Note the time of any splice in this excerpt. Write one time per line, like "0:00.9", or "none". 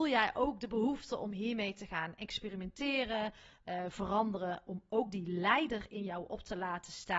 0:03.9